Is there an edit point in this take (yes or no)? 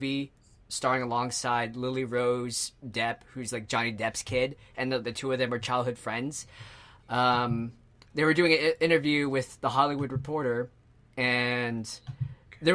no